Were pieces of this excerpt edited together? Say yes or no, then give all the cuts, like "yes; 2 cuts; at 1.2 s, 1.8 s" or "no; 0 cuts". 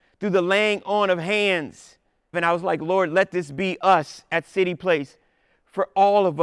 yes; 1 cut; at 2.3 s